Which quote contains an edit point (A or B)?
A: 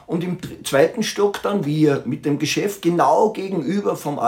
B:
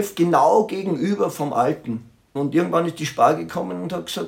B